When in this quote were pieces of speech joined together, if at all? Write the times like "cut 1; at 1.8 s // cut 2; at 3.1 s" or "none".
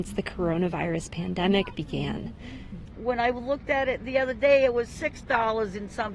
cut 1; at 2.9 s